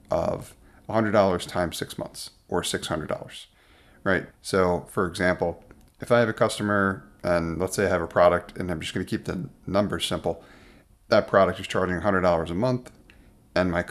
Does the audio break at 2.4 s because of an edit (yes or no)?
no